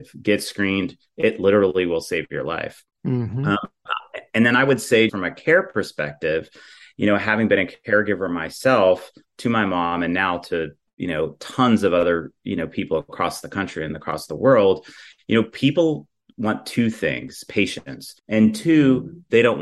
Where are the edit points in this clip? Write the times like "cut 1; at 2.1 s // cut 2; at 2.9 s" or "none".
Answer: cut 1; at 5.1 s // cut 2; at 18.2 s